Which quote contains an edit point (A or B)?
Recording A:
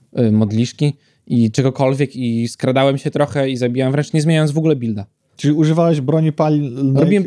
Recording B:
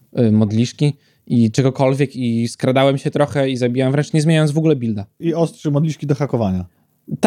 B